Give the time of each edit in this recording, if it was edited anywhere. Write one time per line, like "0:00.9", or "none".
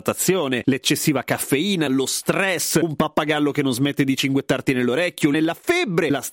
0:01.9
0:05.3